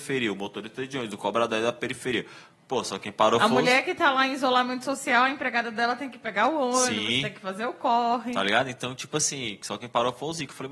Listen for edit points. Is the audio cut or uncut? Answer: uncut